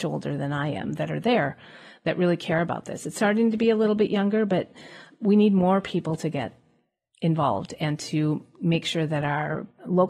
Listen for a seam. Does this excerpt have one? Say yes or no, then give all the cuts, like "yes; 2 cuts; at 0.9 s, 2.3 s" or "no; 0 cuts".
no; 0 cuts